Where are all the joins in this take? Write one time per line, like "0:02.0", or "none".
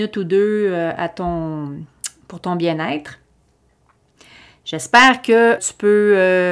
0:05.6